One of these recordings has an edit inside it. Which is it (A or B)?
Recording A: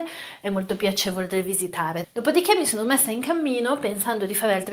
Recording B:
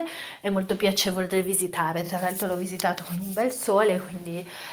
A